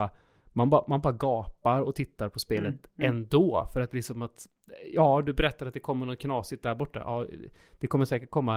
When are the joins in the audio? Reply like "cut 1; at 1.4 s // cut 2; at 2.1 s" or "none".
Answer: none